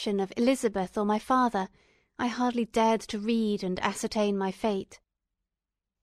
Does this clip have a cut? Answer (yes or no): no